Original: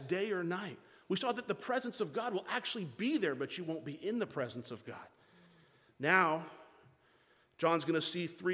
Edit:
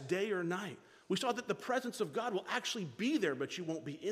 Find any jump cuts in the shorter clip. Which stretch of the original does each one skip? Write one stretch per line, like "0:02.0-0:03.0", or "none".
none